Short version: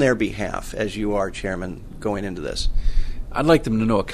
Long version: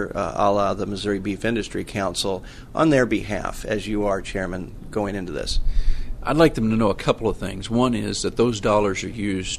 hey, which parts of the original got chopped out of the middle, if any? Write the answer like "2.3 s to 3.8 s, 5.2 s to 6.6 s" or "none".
none